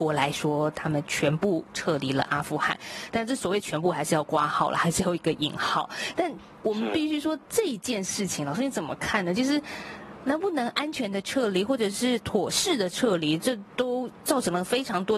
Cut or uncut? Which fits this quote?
uncut